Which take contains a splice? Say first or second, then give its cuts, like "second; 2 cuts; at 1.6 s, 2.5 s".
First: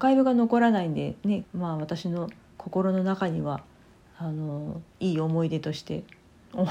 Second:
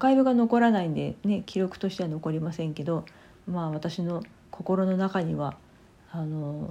first; 2 cuts; at 1.4 s, 4.9 s